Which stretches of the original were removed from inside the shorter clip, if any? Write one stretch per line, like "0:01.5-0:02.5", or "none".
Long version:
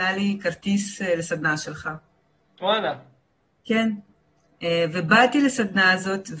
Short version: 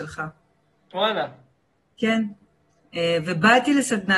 none

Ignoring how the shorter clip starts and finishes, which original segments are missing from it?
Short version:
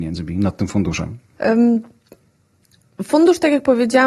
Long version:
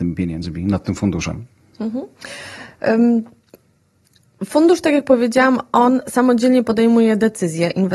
0:01.6-0:02.8

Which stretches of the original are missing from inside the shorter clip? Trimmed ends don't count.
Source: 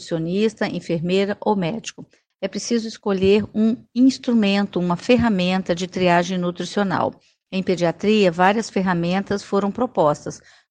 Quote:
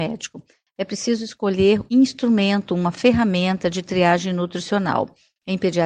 0:03.5-0:03.9

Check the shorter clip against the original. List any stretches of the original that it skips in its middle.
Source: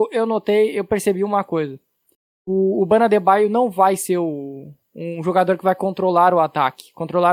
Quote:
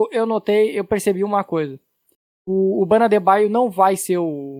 none

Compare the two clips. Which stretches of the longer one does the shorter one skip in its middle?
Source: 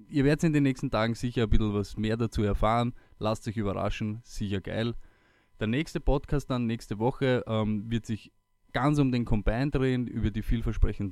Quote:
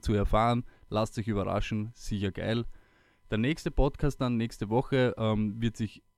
none

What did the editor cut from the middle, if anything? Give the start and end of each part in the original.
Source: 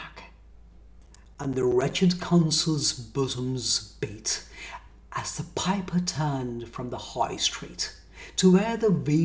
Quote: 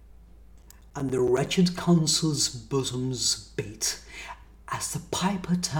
none

